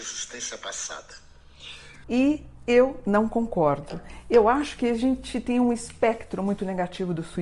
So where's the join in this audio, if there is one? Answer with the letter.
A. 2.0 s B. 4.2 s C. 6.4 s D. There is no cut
A